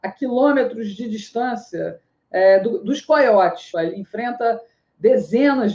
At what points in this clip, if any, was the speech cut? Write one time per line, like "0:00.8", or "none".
0:03.7